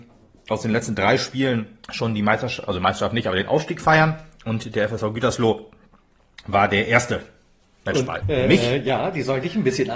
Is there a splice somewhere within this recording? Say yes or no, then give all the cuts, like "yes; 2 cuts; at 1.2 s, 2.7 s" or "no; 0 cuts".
yes; 2 cuts; at 1.8 s, 8.2 s